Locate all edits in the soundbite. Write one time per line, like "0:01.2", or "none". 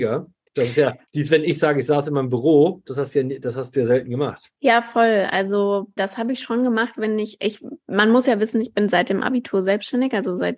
0:06.0